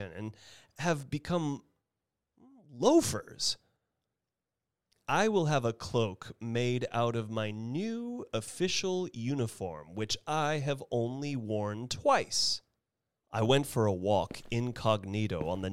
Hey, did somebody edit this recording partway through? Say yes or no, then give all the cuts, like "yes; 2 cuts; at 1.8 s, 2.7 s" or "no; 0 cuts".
yes; 1 cut; at 13.2 s